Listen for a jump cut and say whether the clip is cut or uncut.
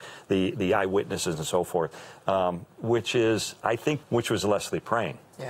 cut